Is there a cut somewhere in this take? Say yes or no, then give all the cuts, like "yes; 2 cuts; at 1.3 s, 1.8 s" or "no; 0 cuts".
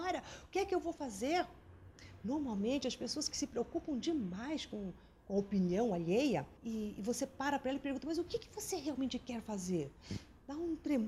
yes; 1 cut; at 6.6 s